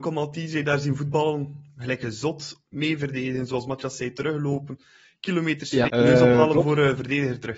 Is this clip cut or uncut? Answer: cut